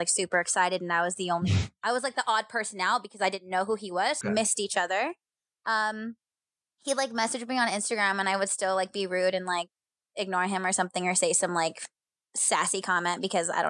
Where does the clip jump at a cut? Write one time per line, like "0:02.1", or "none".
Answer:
0:04.2